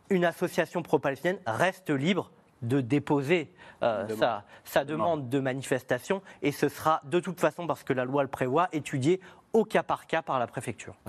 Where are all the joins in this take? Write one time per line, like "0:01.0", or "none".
none